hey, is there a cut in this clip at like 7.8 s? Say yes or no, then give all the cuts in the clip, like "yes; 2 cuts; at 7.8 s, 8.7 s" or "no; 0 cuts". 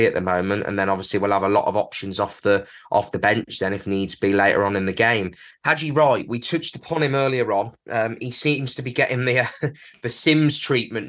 no; 1 cut; at 5.5 s